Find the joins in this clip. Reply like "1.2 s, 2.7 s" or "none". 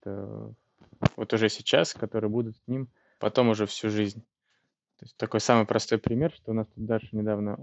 3.2 s